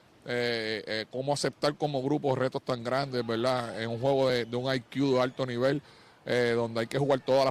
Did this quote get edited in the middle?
no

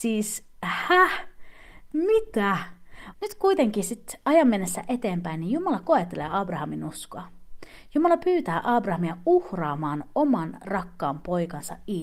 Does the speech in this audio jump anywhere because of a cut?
yes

